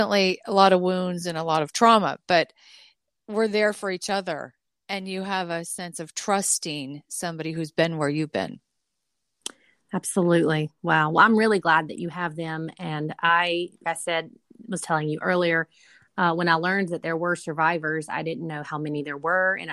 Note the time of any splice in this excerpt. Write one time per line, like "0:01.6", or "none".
0:13.8

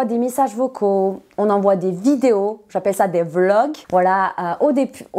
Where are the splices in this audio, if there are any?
0:03.8

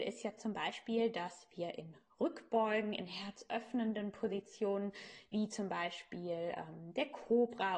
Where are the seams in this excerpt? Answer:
none

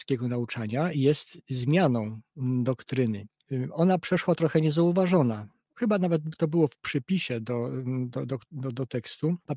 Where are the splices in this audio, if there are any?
none

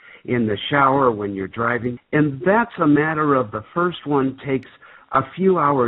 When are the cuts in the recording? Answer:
0:02.0

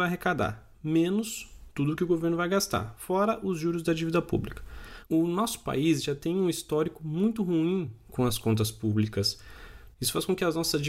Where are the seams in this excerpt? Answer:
0:05.1
0:09.9

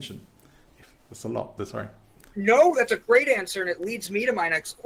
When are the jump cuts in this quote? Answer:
0:01.6

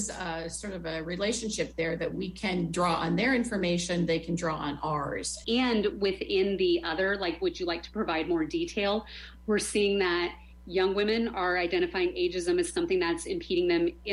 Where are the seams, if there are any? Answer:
0:05.4

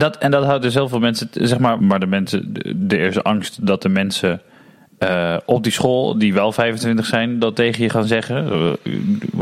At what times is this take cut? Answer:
0:01.8

